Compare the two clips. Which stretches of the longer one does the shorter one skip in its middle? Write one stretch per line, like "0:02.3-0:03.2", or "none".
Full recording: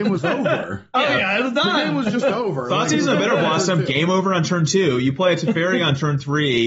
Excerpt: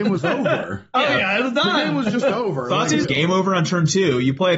0:03.0-0:03.8

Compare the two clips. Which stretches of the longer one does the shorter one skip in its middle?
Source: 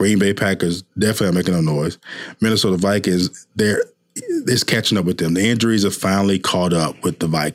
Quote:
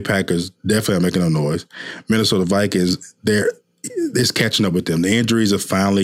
none

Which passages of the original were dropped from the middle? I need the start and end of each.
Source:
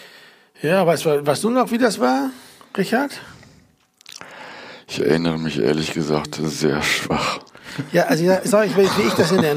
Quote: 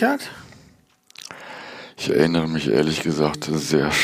none

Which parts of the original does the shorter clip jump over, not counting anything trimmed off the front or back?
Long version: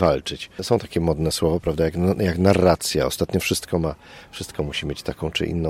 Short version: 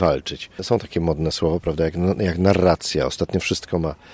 none

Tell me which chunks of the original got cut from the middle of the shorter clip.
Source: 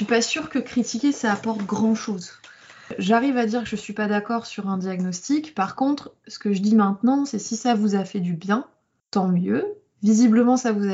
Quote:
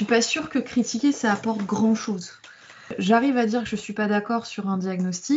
none

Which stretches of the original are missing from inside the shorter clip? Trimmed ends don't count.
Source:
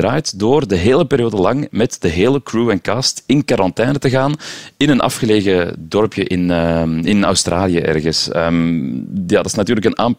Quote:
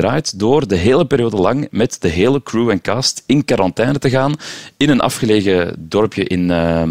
none

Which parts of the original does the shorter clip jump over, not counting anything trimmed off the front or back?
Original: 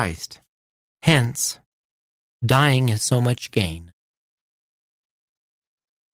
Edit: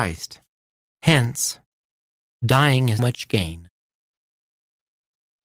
0:03.0-0:03.2

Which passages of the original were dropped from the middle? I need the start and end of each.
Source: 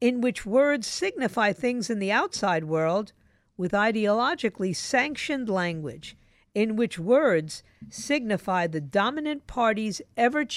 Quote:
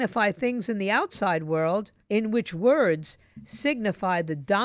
0:03.2-0:06.5

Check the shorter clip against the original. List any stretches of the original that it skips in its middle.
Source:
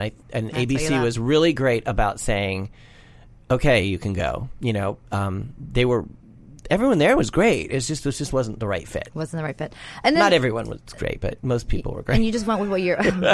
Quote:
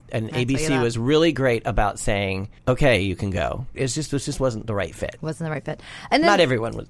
0:02.8-0:03.4
0:04.6-0:07.7

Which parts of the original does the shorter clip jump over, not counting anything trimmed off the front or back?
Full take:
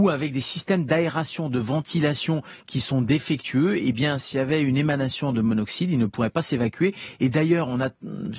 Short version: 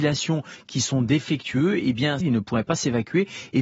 0:04.2-0:05.9

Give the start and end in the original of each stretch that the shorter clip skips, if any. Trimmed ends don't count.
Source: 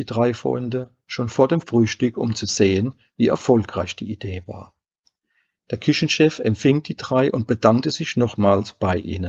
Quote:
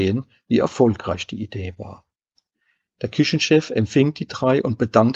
none

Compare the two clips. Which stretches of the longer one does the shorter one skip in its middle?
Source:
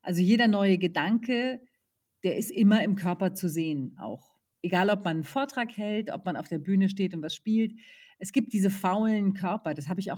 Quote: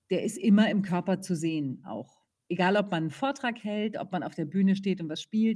none

